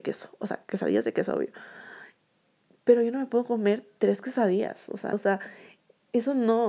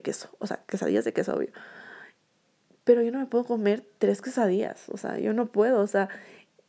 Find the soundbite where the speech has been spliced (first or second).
first